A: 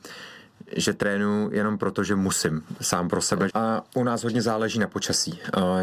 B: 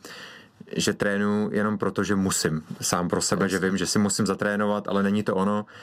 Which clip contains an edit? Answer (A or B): A